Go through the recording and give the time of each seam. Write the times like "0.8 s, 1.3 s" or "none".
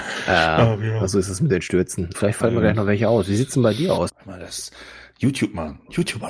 2.1 s, 4.1 s